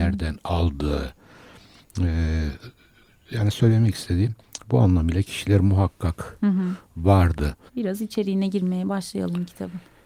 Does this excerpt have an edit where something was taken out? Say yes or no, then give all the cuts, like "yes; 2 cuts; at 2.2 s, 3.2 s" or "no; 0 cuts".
yes; 1 cut; at 7.7 s